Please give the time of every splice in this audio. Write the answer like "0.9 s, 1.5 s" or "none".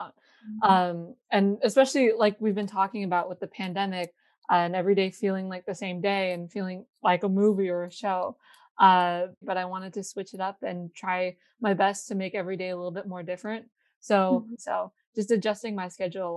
9.4 s, 14.6 s